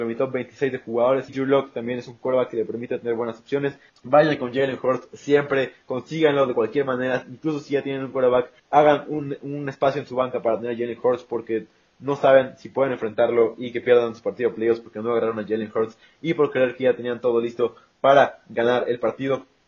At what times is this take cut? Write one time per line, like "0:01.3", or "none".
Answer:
0:01.3
0:03.9
0:08.6